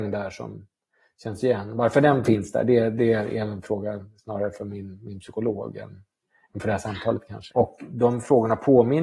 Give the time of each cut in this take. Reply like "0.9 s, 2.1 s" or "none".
7.5 s